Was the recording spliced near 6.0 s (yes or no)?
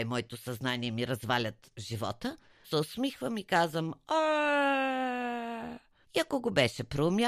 yes